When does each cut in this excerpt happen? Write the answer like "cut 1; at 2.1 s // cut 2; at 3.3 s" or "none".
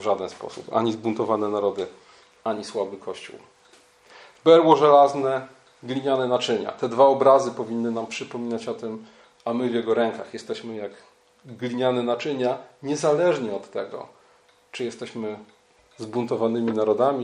cut 1; at 4.3 s // cut 2; at 9.4 s